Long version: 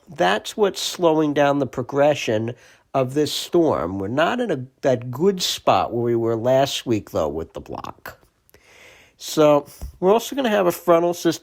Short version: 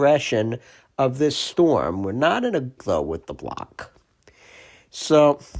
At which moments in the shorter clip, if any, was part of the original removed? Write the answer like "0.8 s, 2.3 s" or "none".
2.8 s